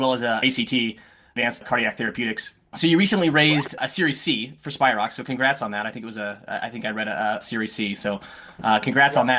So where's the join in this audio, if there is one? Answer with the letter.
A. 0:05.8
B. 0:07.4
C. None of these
B